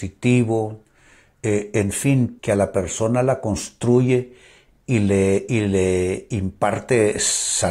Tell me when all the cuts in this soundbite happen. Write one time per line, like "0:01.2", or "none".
0:02.4